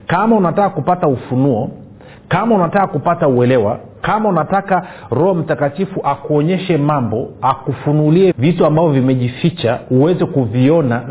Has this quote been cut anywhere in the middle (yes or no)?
yes